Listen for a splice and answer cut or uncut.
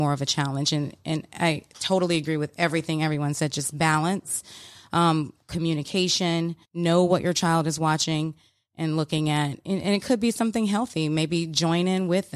cut